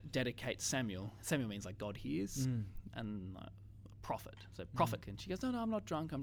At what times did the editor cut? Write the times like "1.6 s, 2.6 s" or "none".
2.9 s, 5.0 s